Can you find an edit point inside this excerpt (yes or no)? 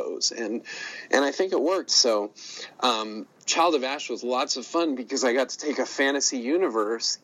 yes